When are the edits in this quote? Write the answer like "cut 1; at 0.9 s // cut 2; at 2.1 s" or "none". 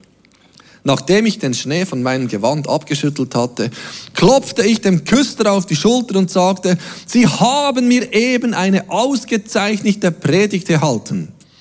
none